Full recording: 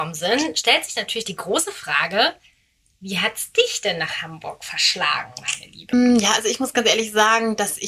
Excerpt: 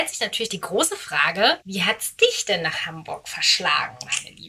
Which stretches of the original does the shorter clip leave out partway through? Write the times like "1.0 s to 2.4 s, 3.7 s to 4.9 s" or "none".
2.4 s to 3.0 s